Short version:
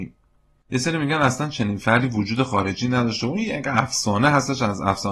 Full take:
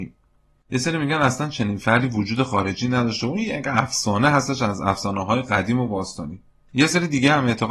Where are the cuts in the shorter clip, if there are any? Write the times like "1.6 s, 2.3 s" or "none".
none